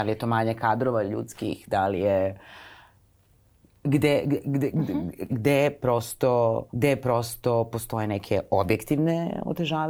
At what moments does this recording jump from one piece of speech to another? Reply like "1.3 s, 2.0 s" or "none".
5.3 s, 6.7 s